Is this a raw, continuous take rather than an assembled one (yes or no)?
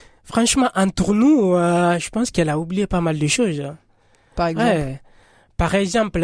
yes